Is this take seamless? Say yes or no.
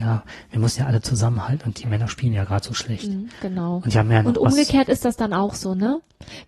yes